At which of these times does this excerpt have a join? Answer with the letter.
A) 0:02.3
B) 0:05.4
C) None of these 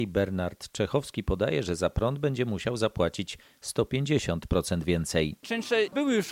B